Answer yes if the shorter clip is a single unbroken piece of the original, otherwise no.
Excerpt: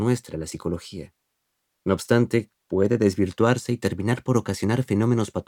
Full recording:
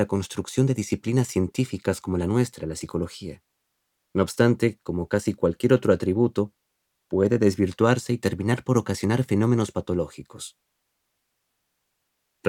no